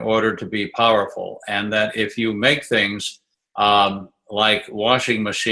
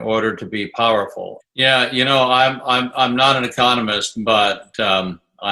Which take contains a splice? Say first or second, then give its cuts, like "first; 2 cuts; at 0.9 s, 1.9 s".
second; 1 cut; at 1.4 s